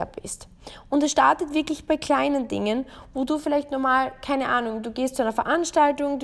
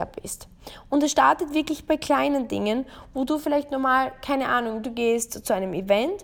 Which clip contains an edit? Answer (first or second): second